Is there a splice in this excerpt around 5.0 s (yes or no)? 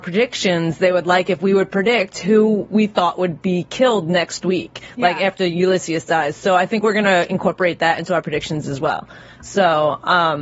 no